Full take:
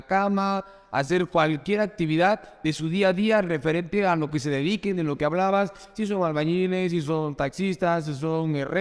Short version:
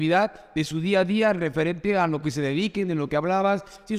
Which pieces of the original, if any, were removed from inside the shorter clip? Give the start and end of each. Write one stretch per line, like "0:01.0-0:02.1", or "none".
none